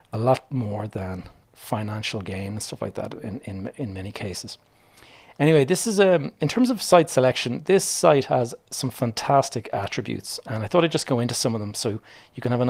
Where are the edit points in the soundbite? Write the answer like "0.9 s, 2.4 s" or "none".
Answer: none